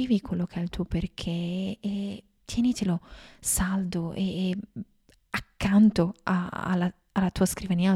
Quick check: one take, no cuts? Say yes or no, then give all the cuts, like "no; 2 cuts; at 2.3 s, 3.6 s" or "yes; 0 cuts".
yes; 0 cuts